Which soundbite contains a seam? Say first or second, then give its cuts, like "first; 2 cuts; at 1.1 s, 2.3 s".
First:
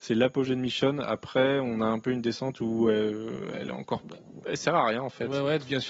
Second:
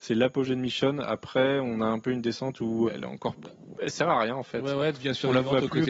second; 1 cut; at 2.9 s